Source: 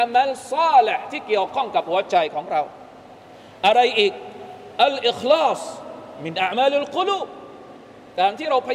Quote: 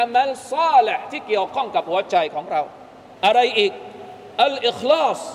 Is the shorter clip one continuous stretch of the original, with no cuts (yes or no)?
no